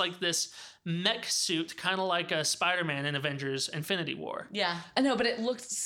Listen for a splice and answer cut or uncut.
cut